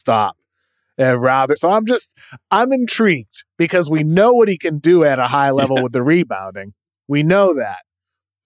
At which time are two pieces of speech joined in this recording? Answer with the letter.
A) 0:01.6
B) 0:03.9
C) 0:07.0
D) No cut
A